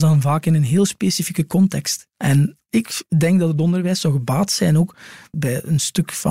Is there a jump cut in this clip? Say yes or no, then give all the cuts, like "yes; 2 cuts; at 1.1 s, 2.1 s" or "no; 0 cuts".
yes; 1 cut; at 5.3 s